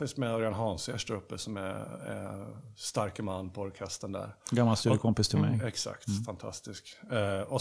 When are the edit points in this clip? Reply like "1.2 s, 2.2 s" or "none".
none

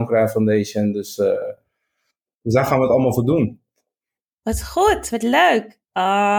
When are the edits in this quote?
none

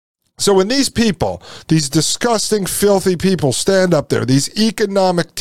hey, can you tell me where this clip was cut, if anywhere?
none

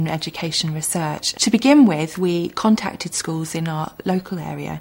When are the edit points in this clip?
1.3 s

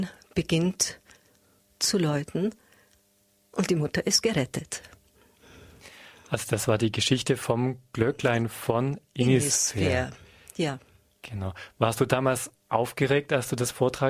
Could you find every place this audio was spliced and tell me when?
none

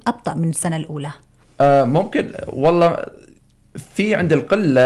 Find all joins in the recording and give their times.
none

